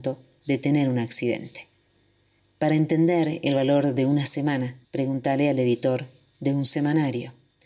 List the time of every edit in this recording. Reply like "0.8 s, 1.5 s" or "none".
2.4 s, 4.8 s